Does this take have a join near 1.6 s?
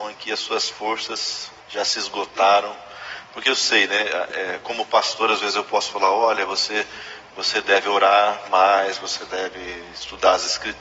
yes; 1 cut; at 1.6 s

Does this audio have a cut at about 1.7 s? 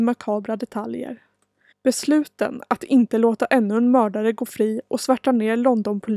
yes; 1 cut; at 1.7 s

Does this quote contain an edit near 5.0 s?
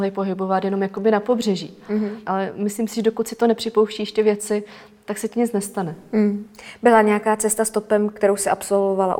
no; 1 cut; at 2.2 s

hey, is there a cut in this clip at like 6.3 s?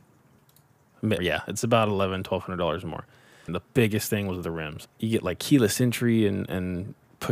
no; 3 cuts; at 1.2 s, 3.5 s, 4.9 s

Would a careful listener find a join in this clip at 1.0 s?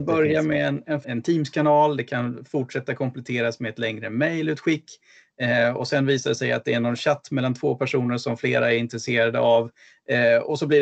yes; 1 cut; at 1.0 s

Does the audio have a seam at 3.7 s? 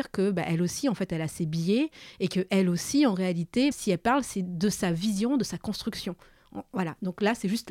yes; 1 cut; at 3.7 s

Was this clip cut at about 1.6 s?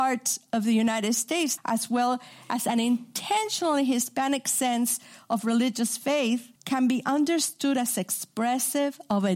yes; 2 cuts; at 1.6 s, 6.6 s

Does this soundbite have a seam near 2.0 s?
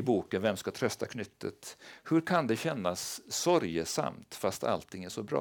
no; 0 cuts

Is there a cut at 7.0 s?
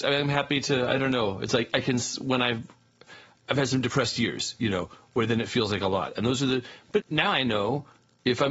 yes; 1 cut; at 7.0 s

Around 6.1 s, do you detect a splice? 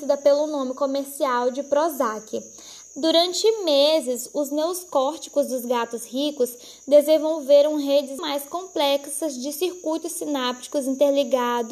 no; 2 cuts; at 2.8 s, 8.2 s

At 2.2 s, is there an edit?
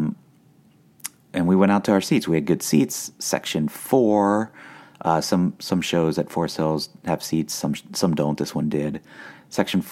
no; 0 cuts

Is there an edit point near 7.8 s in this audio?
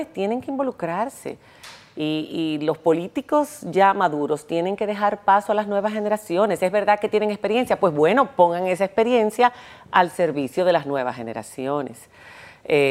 no; 0 cuts

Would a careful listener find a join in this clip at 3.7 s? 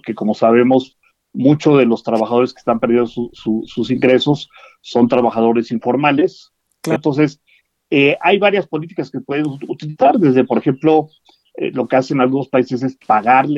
no; 1 cut; at 7.0 s

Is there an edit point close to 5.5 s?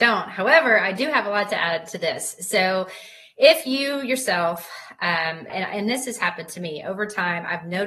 yes; 1 cut; at 5.5 s

